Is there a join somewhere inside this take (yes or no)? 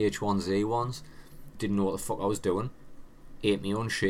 yes